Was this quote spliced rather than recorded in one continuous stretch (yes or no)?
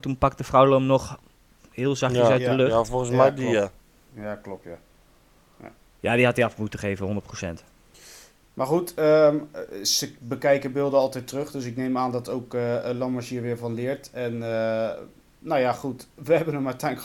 no